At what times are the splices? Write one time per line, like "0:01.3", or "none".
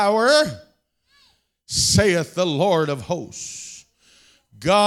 0:01.5

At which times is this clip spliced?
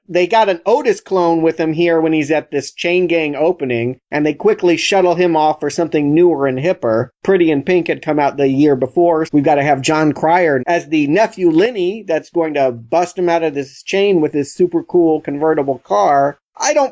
0:09.3
0:10.6

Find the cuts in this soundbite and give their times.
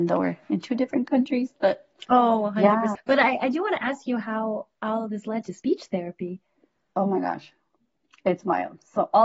0:02.9

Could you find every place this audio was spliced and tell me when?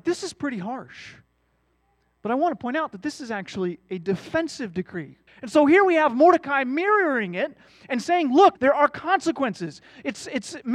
0:05.3
0:08.5

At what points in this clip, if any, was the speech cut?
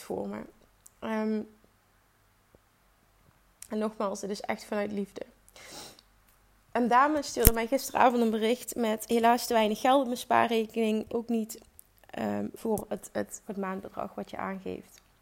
0:11.1
0:13.5

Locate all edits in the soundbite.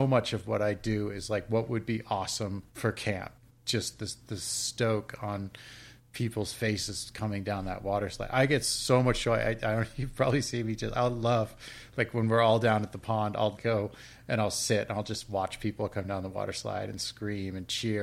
0:13.6

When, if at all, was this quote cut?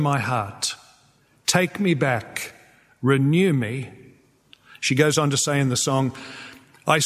none

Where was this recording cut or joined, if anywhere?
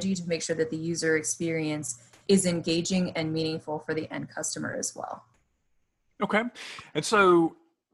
none

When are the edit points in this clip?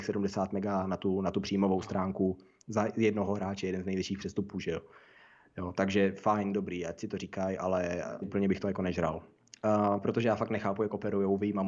0:08.2
0:10.0

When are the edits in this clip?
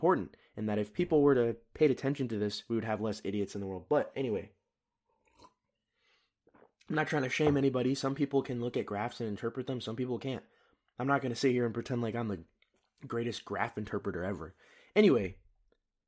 none

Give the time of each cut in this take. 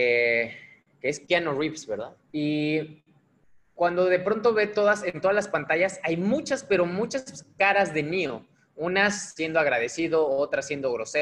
0:02.3

